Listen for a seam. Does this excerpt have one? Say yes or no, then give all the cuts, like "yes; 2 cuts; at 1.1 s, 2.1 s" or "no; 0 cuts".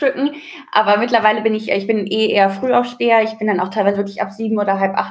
no; 0 cuts